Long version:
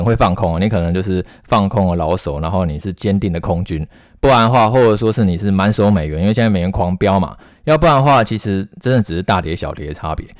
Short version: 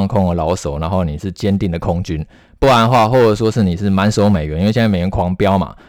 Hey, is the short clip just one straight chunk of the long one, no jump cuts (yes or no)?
yes